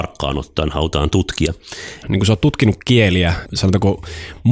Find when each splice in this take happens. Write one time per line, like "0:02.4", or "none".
0:02.0
0:03.4

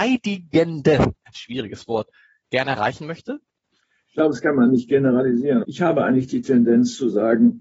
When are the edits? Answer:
0:05.6

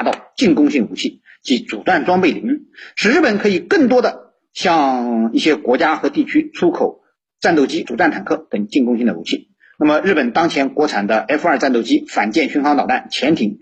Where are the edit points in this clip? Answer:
0:07.8

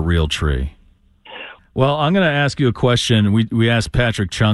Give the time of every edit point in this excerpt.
0:01.6

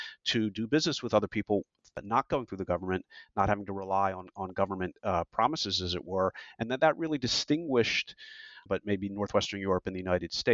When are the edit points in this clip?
0:08.7

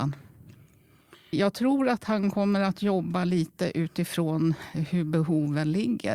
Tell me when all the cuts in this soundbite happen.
0:01.3

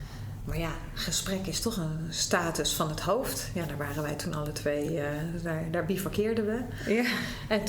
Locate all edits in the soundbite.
none

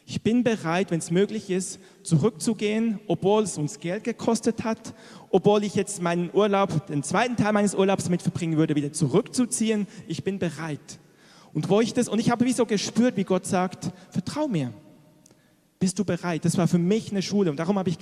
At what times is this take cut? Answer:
none

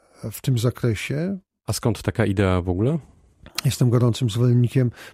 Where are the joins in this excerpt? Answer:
0:01.7

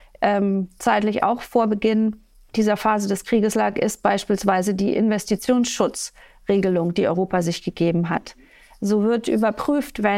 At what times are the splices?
none

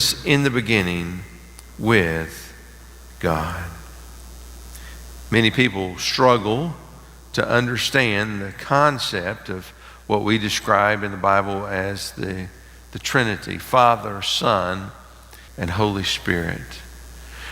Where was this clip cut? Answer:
0:15.5

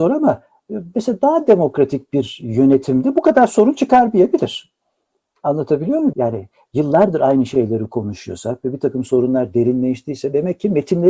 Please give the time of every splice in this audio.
0:06.1

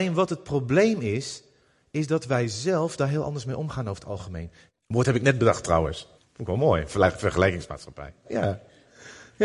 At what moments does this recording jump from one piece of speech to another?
0:04.7
0:06.1
0:08.2

